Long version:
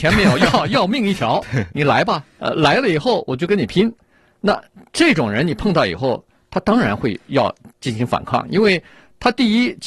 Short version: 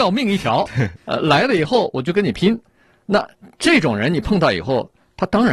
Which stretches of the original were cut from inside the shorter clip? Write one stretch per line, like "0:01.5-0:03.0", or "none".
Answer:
0:01.7-0:02.3